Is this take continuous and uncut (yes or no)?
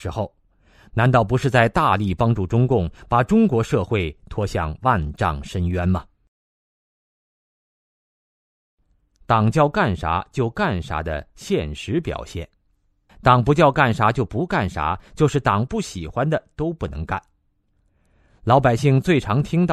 no